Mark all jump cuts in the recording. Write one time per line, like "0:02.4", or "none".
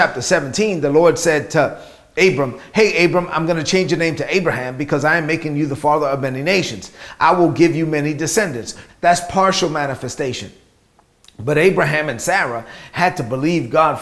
0:08.9